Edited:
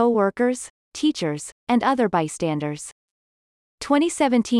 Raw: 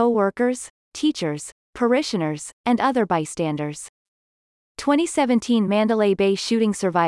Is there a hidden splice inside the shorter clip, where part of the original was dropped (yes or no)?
yes